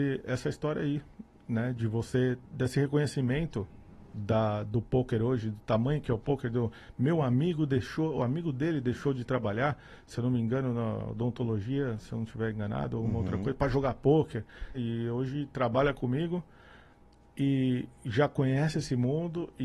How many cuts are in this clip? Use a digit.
1